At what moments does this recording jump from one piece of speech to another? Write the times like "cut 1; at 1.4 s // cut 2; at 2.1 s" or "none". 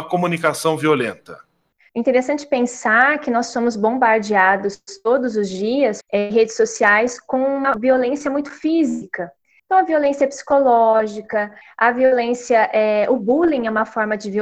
cut 1; at 6.0 s // cut 2; at 9.6 s // cut 3; at 11.6 s